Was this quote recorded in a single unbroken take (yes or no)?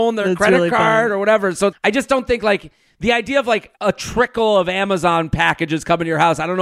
no